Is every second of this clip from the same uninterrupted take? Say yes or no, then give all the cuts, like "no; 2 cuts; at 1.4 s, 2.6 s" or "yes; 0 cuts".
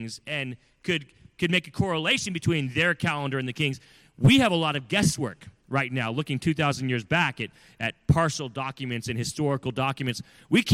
yes; 0 cuts